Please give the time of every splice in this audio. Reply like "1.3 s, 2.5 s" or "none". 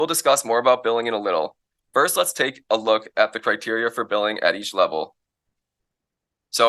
none